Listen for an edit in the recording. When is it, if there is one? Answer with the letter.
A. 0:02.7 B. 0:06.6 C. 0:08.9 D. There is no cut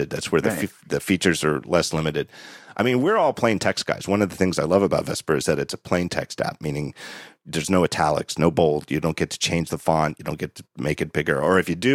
D